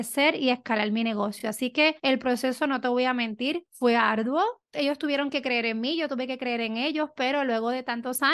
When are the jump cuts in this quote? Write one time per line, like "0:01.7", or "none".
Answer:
none